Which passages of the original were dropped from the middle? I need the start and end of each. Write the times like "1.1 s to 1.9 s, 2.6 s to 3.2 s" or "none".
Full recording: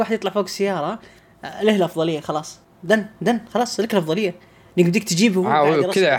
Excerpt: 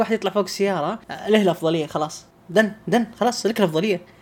1.0 s to 1.4 s